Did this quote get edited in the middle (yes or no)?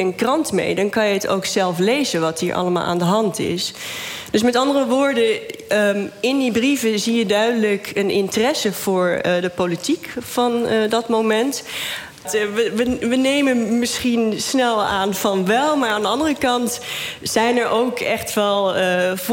yes